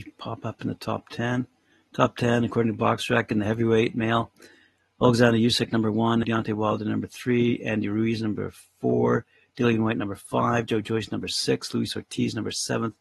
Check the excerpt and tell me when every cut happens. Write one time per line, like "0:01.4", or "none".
0:06.2